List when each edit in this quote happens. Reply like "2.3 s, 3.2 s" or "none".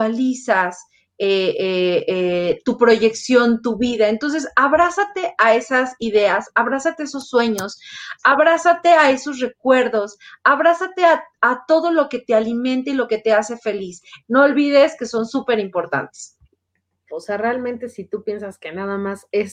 14.2 s, 17.1 s